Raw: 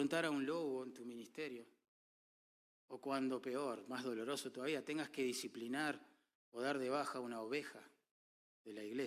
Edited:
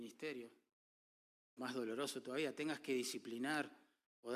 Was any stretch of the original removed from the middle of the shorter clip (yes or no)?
yes